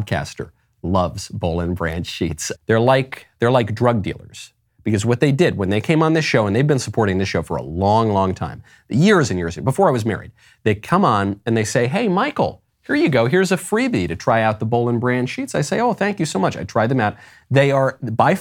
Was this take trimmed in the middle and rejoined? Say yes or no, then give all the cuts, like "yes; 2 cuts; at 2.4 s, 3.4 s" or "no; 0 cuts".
yes; 1 cut; at 2.5 s